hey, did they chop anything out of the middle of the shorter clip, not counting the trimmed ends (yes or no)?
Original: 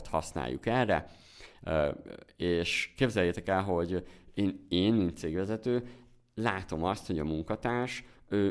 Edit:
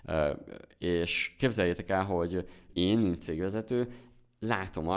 yes